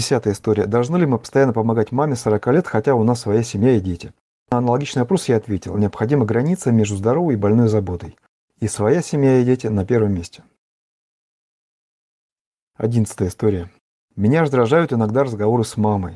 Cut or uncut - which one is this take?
uncut